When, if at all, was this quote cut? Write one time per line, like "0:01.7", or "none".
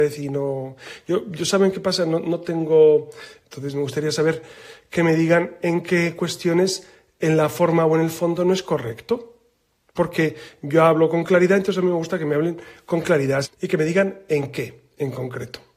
0:03.4
0:13.4